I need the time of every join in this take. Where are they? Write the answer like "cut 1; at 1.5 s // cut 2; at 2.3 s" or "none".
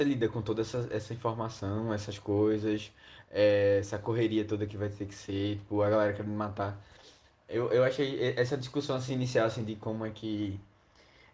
none